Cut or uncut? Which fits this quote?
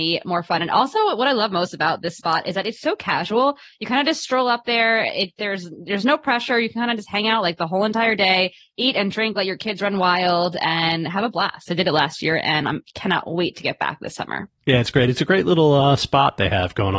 cut